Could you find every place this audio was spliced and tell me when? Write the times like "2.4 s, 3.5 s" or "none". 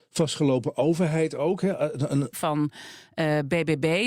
2.3 s